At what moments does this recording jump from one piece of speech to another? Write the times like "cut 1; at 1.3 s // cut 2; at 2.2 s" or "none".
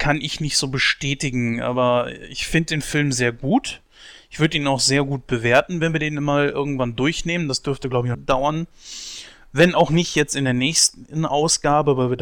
cut 1; at 8.1 s